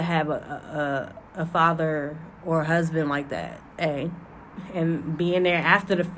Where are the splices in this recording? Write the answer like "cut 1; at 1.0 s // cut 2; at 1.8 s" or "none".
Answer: cut 1; at 1.3 s // cut 2; at 3.6 s